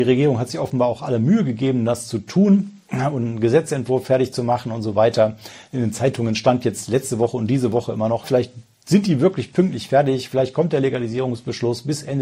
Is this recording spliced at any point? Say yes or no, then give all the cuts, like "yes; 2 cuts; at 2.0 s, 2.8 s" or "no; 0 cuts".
yes; 1 cut; at 8.2 s